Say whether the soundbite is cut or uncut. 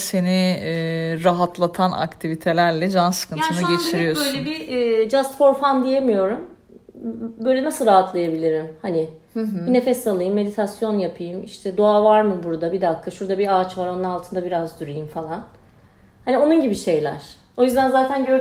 uncut